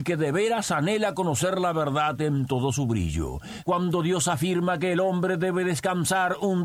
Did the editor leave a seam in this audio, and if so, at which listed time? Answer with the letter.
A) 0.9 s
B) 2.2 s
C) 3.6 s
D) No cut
C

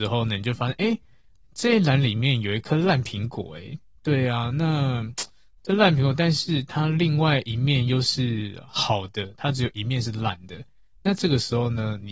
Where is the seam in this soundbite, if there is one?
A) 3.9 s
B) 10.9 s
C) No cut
C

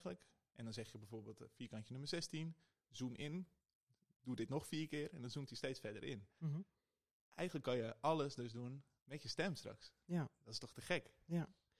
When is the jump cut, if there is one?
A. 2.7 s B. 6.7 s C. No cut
C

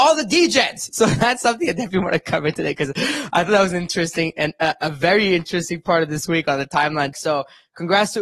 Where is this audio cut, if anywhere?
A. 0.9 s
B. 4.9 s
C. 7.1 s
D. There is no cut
C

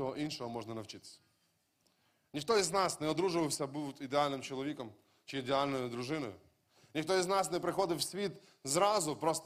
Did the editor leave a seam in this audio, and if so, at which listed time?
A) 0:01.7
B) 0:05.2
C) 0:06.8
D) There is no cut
D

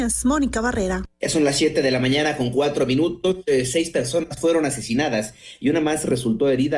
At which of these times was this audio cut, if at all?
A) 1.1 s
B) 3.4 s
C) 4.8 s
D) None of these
A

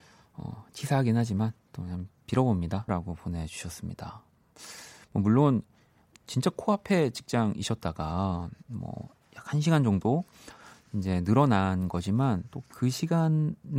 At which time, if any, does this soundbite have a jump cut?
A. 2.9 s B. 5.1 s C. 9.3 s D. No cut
A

